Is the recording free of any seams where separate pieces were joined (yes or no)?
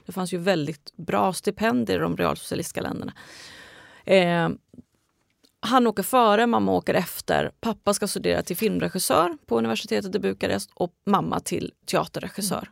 no